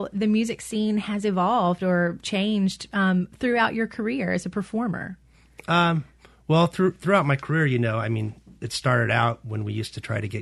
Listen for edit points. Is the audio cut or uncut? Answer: uncut